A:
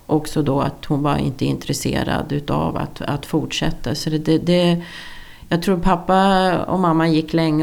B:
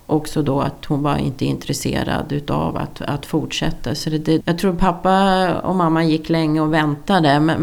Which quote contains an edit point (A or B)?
B